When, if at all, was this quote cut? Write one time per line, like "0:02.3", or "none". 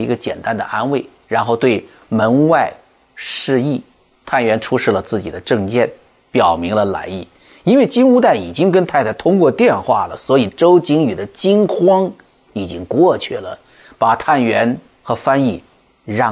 0:04.1